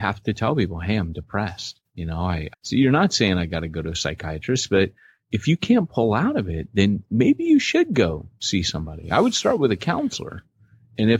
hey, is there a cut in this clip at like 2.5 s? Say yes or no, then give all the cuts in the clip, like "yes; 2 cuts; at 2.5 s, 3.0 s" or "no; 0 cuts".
yes; 1 cut; at 2.5 s